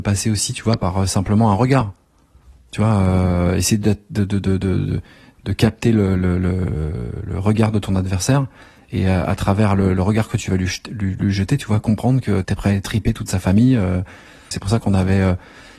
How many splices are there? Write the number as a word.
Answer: two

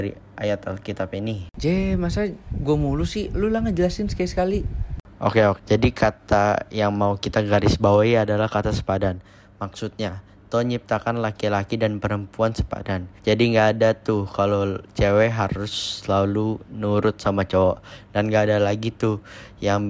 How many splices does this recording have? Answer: two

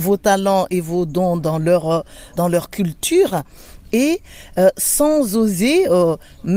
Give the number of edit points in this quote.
one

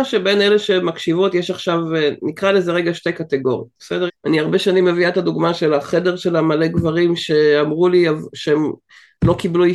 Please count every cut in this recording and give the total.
one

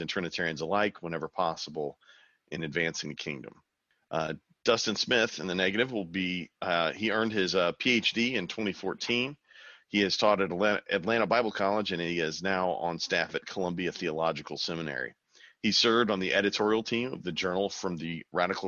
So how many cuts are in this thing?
zero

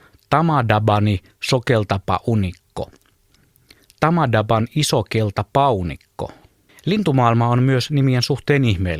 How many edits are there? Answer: one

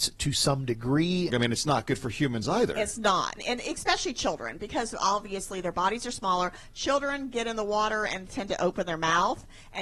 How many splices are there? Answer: two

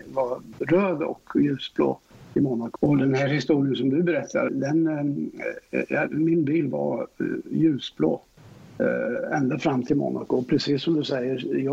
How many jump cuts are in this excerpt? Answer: two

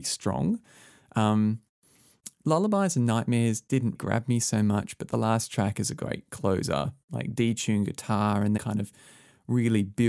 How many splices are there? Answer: two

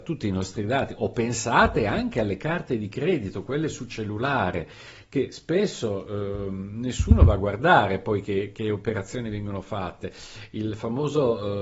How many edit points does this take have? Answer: zero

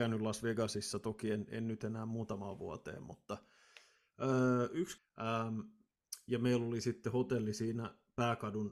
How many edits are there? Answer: one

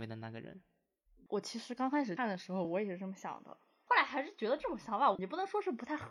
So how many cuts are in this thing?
zero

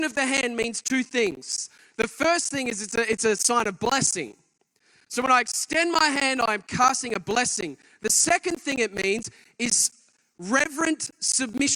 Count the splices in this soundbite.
zero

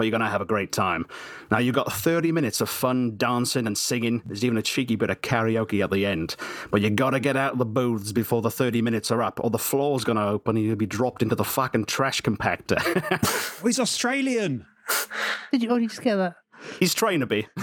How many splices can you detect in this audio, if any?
zero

